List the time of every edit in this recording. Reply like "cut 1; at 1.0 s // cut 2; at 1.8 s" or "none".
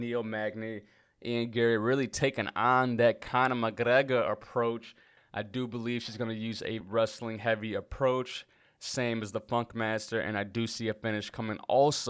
cut 1; at 5.2 s // cut 2; at 6.8 s